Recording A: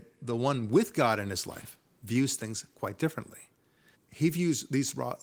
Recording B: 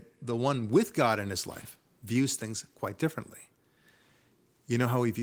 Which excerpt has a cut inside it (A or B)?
A